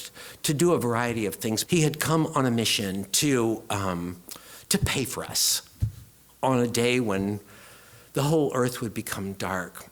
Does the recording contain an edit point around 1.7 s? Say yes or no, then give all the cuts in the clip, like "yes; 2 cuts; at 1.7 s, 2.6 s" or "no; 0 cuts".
yes; 1 cut; at 1.7 s